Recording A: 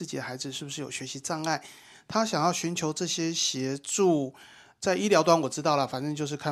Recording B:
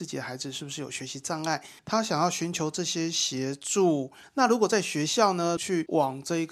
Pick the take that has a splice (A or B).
B